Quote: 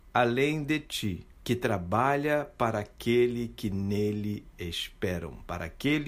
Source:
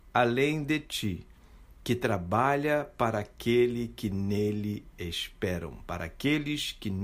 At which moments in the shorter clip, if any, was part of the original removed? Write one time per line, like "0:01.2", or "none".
0:01.3